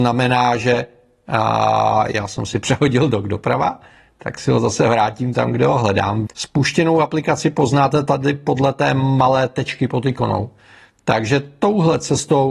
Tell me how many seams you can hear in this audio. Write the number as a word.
one